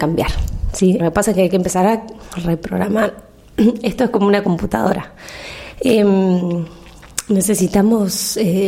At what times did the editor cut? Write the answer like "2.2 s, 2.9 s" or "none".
1.0 s